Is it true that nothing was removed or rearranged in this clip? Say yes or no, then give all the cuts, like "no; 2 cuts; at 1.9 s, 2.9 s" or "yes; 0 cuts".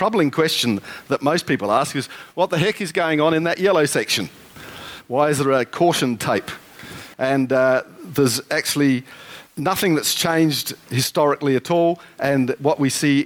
no; 2 cuts; at 7.1 s, 9.5 s